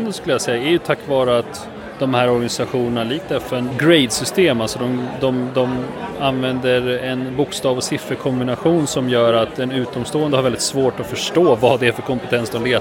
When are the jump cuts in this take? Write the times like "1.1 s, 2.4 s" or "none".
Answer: 3.7 s